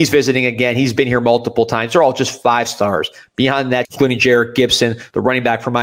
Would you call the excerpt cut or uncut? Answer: cut